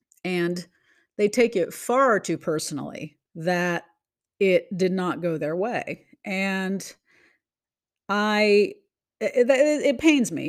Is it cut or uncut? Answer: cut